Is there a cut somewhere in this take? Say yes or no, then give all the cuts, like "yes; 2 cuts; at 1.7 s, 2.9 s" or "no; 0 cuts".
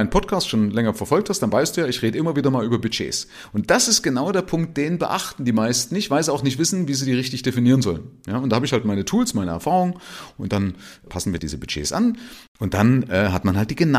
no; 0 cuts